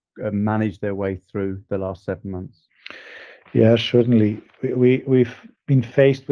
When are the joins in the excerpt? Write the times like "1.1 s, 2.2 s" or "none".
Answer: none